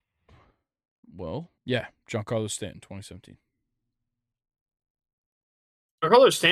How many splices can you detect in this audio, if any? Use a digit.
1